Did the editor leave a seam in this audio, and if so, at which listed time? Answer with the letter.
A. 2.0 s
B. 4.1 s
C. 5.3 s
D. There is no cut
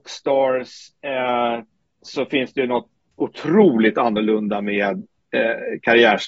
A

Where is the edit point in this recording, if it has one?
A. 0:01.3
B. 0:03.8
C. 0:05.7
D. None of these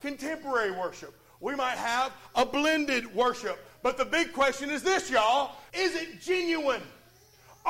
C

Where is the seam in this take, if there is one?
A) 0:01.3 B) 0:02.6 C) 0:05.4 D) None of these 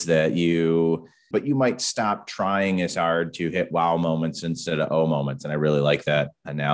A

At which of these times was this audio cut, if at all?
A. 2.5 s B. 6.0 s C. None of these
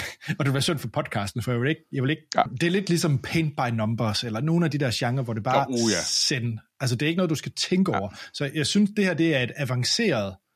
A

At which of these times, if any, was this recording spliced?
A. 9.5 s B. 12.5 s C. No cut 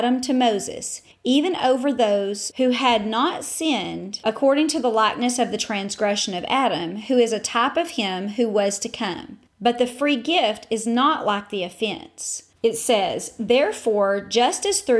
B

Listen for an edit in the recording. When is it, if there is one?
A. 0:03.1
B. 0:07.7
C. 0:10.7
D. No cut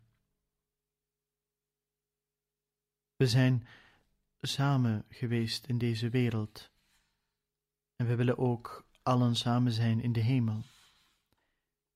D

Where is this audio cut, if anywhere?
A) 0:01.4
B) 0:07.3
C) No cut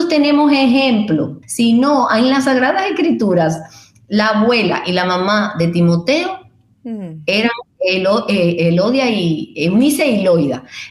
A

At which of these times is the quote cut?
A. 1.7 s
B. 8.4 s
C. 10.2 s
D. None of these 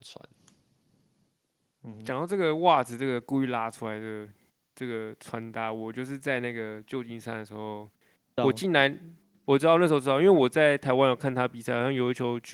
B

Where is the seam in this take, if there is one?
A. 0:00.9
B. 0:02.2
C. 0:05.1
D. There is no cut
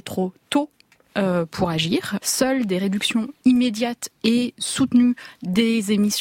B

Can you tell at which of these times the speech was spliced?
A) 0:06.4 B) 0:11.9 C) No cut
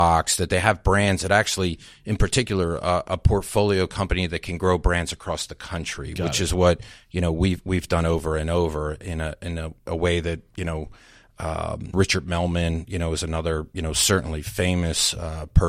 B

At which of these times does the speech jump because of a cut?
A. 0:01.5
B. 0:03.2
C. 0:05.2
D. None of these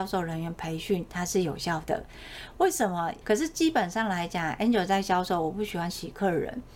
B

